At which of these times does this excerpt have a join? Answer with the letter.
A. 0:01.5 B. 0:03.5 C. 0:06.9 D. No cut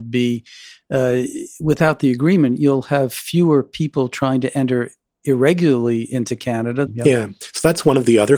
C